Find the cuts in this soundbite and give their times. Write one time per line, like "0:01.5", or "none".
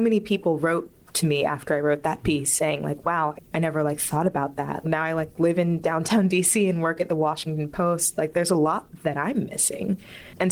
0:03.4
0:04.8